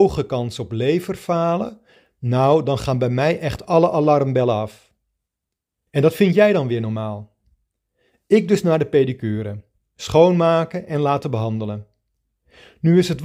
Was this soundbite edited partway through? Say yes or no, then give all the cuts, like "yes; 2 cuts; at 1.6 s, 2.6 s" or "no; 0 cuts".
yes; 1 cut; at 5.9 s